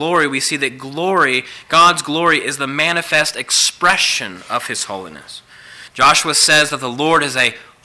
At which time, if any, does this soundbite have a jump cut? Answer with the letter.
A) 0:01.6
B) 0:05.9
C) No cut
B